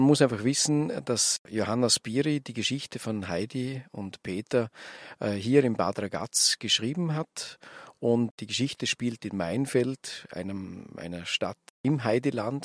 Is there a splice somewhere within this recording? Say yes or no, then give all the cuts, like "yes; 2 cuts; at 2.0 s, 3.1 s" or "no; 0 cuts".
no; 0 cuts